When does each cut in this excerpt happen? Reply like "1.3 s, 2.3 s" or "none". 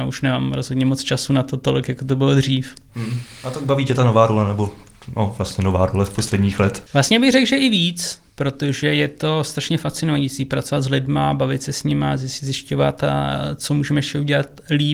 none